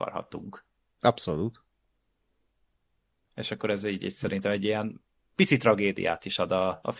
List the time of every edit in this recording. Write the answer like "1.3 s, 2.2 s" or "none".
3.3 s